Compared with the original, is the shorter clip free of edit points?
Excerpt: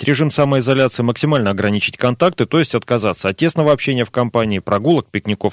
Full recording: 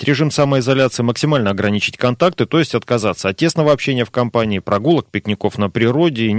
yes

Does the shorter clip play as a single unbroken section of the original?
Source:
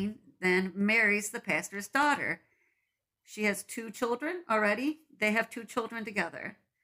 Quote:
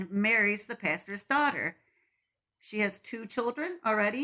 yes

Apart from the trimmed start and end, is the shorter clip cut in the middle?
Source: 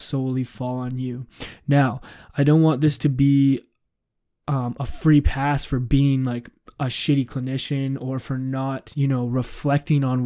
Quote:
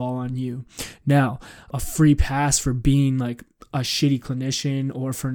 yes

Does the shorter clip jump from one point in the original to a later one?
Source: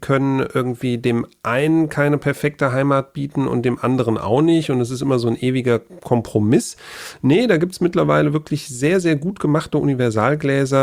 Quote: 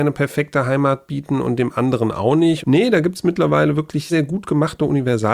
yes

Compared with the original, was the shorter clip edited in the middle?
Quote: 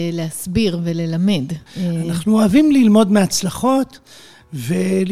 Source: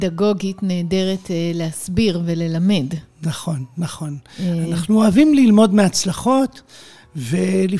yes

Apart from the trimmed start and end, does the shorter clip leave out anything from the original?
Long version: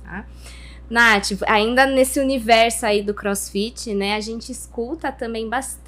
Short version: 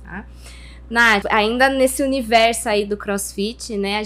yes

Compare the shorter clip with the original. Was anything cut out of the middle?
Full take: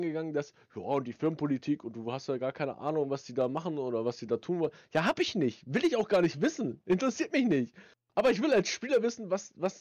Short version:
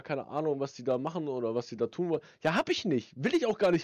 no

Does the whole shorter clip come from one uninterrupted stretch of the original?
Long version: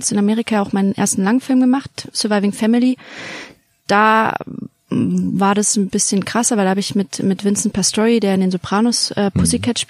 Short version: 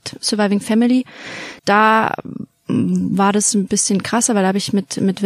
no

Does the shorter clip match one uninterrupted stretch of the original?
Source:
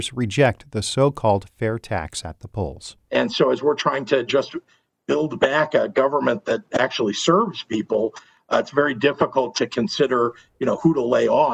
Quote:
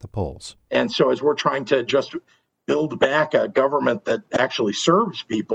yes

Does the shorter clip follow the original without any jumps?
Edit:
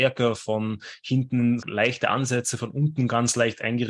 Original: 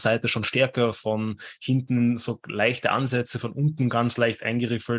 no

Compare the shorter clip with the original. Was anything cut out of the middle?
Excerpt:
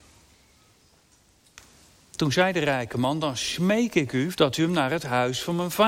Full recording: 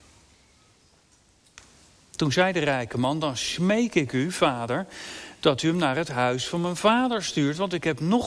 yes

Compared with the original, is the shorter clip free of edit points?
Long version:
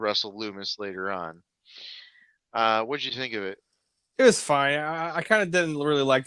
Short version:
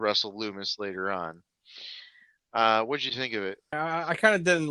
no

